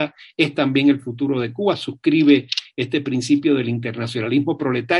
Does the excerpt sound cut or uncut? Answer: uncut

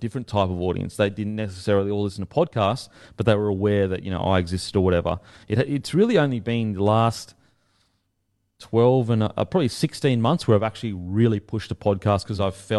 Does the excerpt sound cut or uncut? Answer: uncut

